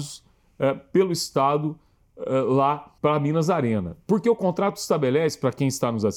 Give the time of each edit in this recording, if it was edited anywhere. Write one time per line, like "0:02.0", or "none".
0:03.0